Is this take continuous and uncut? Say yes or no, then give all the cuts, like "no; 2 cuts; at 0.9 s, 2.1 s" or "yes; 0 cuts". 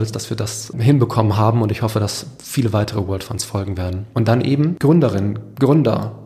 no; 1 cut; at 4.1 s